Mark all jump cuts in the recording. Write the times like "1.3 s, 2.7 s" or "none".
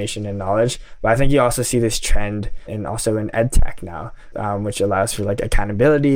2.7 s, 4.3 s